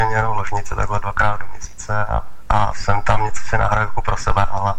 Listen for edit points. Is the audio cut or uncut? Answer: uncut